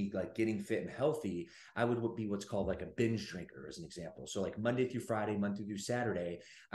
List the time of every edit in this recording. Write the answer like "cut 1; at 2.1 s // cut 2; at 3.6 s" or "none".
none